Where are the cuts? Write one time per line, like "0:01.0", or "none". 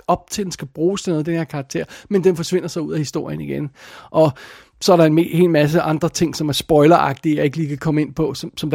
none